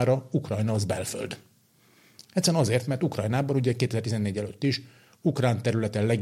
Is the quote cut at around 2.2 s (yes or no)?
no